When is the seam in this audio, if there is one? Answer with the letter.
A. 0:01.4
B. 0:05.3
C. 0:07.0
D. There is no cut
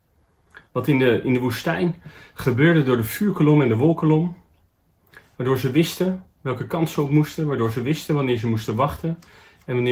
D